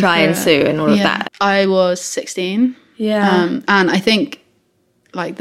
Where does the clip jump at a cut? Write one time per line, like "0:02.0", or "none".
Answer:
0:01.2
0:03.6